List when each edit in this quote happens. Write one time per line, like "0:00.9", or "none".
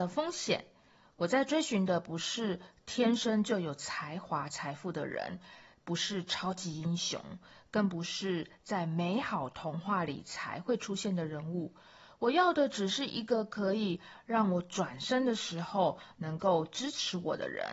none